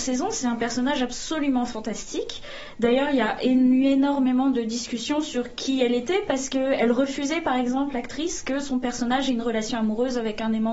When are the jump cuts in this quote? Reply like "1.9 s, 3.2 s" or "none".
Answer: none